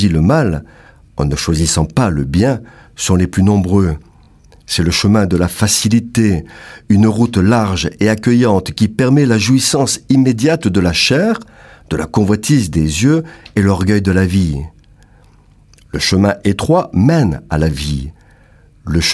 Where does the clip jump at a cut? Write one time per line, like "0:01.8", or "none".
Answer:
none